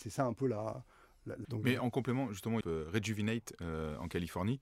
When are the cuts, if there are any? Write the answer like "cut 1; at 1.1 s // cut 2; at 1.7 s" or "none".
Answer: cut 1; at 1.4 s // cut 2; at 2.6 s